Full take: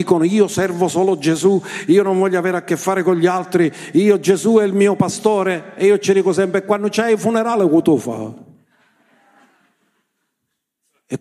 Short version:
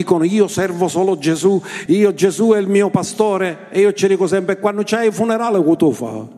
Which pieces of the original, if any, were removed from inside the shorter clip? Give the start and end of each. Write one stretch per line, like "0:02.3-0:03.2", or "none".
0:01.9-0:03.9